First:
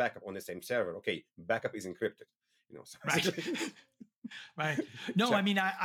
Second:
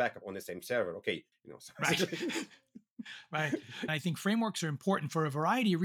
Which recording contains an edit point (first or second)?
second